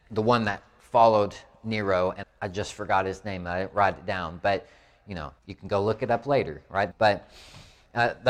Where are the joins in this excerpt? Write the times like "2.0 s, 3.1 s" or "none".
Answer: 2.2 s, 5.4 s, 6.9 s